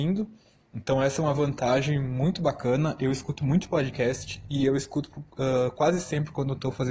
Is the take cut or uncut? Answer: uncut